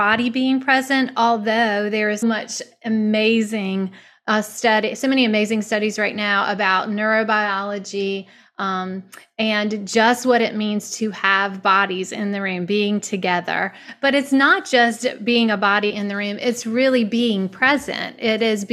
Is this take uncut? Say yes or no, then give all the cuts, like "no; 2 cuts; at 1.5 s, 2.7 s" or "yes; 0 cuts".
no; 1 cut; at 2.2 s